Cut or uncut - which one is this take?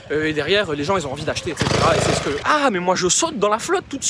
cut